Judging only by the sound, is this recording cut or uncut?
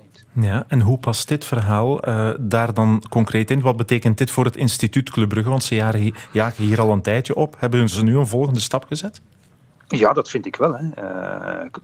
uncut